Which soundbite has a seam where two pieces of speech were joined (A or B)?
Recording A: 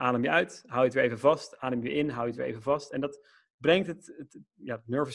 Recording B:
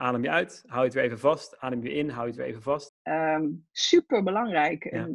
B